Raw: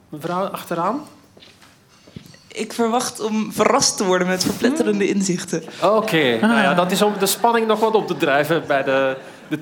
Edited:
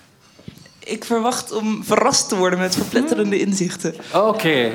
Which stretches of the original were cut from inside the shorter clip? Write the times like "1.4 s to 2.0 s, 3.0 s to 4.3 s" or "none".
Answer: none